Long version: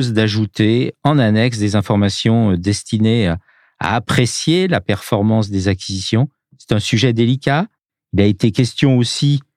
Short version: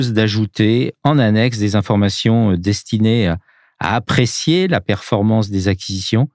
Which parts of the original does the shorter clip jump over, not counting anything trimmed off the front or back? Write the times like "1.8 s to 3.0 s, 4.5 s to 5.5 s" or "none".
none